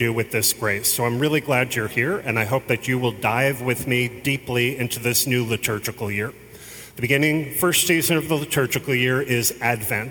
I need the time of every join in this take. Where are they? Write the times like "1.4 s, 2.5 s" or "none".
none